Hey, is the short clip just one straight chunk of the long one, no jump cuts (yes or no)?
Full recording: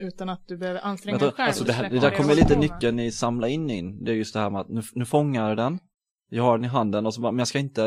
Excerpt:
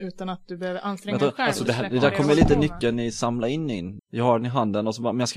no